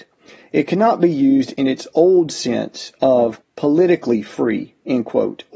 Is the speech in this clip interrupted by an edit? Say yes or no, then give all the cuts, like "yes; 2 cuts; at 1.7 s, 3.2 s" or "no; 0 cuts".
yes; 1 cut; at 3.4 s